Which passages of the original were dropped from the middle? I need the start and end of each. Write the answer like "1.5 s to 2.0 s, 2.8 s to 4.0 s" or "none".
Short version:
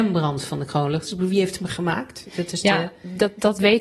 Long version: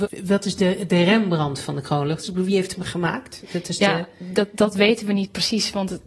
none